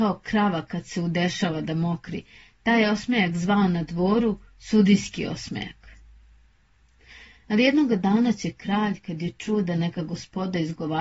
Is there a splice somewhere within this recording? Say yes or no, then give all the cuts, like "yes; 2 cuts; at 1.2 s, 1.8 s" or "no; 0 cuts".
no; 0 cuts